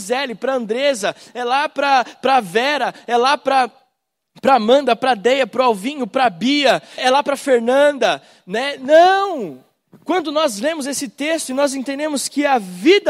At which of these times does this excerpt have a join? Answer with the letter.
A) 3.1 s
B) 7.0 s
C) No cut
B